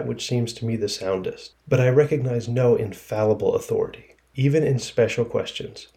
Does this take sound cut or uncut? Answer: uncut